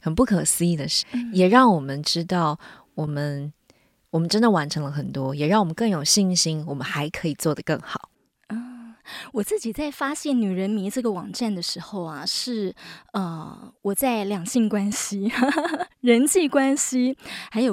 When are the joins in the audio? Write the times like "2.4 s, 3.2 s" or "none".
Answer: 1.0 s